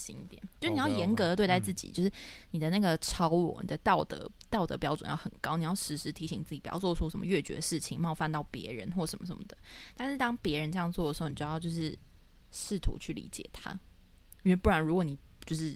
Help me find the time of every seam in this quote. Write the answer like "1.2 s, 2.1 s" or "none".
none